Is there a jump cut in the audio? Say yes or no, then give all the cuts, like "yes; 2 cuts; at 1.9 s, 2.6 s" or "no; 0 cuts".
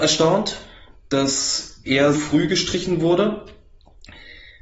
yes; 1 cut; at 2.1 s